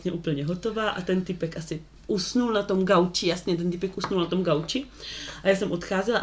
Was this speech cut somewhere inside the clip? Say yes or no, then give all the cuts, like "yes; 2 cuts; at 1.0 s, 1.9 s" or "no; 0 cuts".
no; 0 cuts